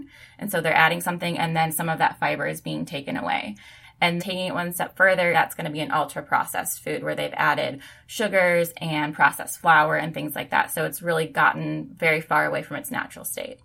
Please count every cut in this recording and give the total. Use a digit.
2